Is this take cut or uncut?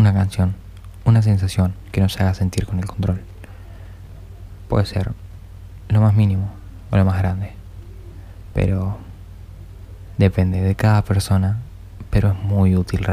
uncut